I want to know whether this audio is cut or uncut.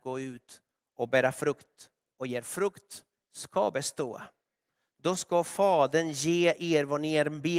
uncut